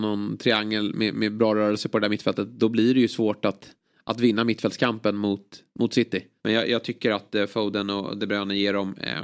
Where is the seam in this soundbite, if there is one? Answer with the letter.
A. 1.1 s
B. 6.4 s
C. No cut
B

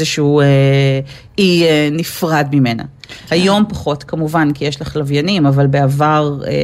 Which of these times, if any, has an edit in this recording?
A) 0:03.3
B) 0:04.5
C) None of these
A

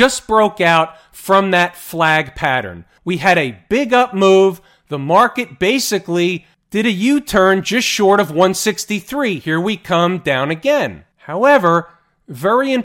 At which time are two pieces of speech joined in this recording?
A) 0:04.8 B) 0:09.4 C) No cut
C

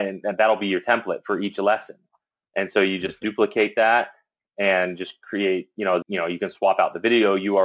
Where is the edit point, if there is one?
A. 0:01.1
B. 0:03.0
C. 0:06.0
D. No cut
C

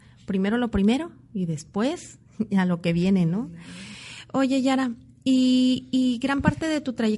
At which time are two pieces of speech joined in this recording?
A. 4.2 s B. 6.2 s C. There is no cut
C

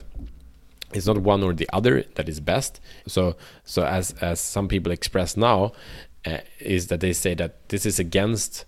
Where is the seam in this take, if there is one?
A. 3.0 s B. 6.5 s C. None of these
A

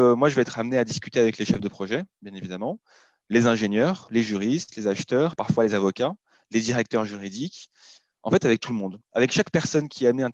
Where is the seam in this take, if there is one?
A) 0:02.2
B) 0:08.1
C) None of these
C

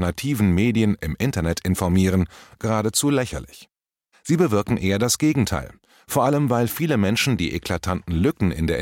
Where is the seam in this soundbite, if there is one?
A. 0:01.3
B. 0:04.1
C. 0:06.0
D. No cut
B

